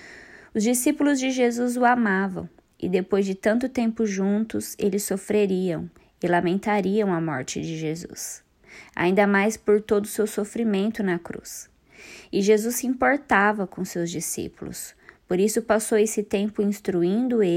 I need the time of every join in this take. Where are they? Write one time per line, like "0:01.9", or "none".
none

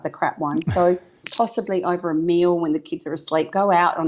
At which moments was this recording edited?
0:01.2

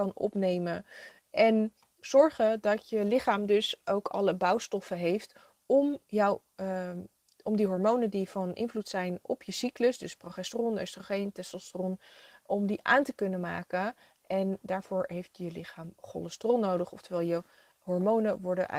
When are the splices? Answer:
none

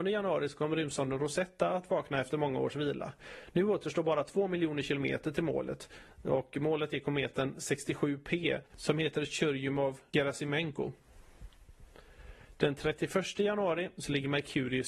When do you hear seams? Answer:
none

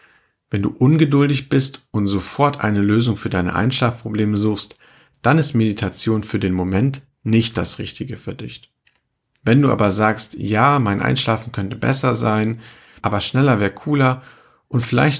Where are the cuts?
0:13.0

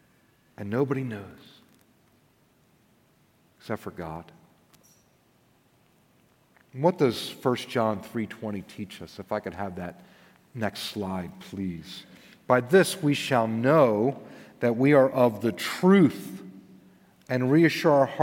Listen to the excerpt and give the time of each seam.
none

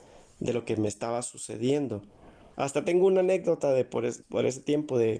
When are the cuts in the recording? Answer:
0:02.5
0:04.2

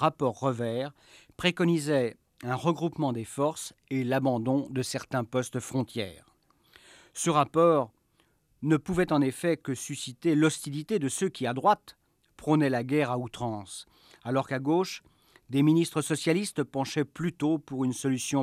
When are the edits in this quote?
none

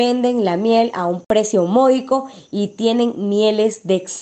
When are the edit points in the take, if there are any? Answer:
none

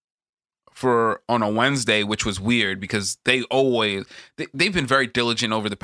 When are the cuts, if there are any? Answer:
none

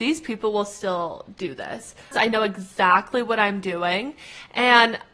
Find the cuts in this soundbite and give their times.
0:02.1

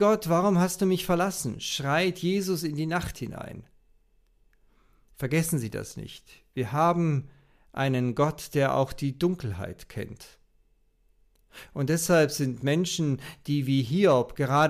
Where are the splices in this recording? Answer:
none

